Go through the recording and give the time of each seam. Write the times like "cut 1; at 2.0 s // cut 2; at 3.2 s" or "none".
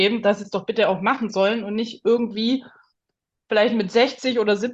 none